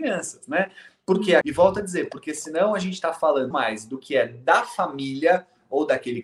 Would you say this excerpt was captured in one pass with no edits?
no; 2 cuts; at 1.4 s, 3.5 s

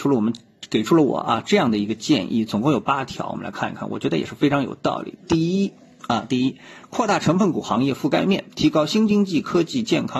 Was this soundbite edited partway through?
no; 0 cuts

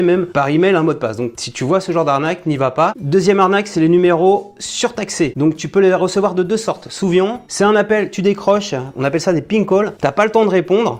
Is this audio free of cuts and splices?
yes; 0 cuts

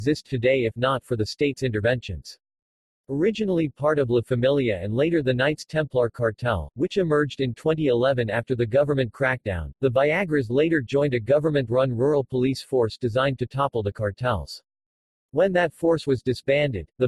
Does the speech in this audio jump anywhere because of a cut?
no; 0 cuts

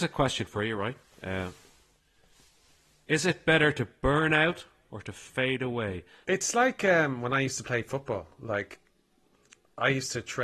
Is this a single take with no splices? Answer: no; 1 cut; at 6.2 s

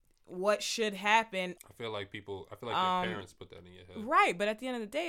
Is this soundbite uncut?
no; 1 cut; at 1.6 s

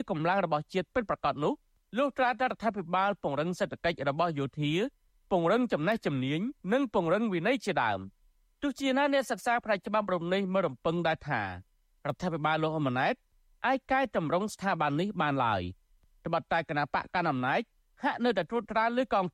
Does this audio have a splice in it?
yes; 1 cut; at 6.6 s

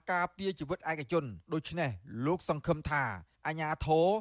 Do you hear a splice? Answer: yes; 1 cut; at 1.4 s

